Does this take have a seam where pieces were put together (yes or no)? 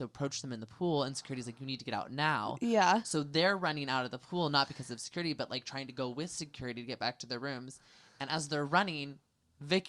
no